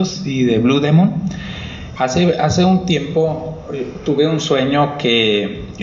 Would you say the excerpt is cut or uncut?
cut